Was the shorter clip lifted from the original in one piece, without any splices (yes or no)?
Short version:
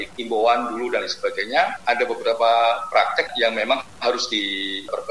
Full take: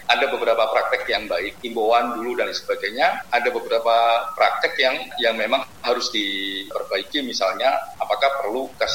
no